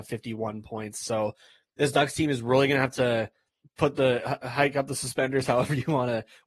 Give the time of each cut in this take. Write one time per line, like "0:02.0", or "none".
0:03.6